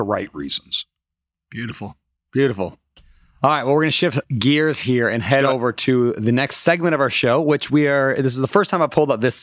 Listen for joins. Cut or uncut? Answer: uncut